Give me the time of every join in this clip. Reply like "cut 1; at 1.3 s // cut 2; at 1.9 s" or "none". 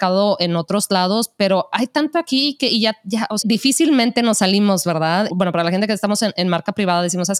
cut 1; at 3.4 s // cut 2; at 5.3 s

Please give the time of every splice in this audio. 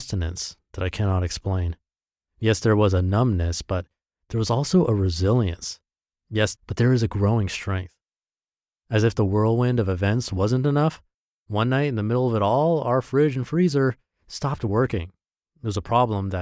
cut 1; at 6.5 s

